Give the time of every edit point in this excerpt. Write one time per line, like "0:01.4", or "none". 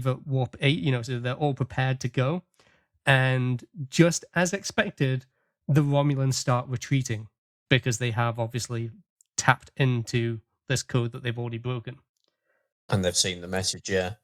none